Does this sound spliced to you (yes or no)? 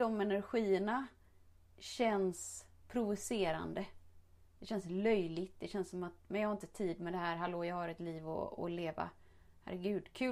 no